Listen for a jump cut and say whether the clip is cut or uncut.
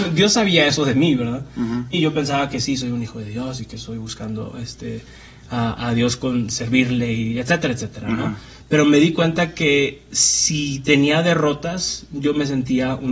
cut